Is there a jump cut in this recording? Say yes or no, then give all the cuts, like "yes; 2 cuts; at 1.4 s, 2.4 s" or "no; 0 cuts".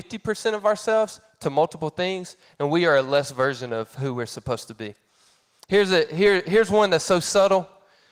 no; 0 cuts